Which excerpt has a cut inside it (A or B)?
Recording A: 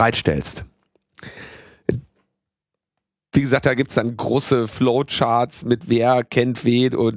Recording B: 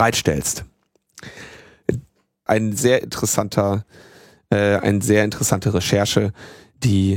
B